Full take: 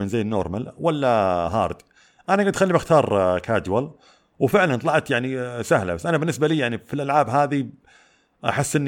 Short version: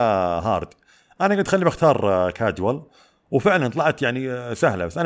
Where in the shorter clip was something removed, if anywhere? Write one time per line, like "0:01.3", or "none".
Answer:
none